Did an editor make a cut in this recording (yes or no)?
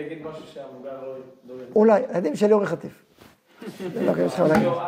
no